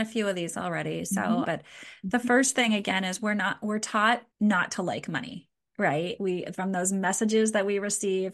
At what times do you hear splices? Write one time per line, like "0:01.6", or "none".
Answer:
0:01.4
0:04.3
0:06.2